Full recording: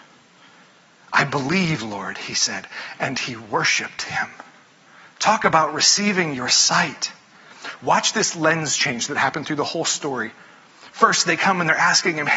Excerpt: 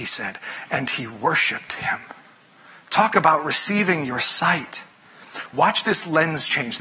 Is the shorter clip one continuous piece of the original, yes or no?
yes